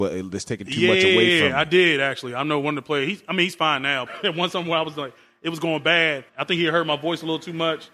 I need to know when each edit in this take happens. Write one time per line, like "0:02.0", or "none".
0:04.1
0:06.3